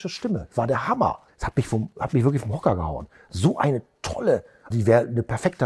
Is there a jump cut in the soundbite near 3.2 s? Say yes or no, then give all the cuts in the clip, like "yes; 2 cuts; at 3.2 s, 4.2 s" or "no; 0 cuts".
no; 2 cuts; at 1.3 s, 4.7 s